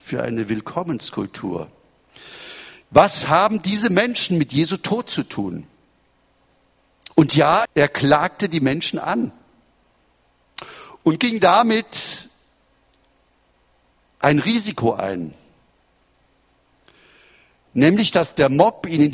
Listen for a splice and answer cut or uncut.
cut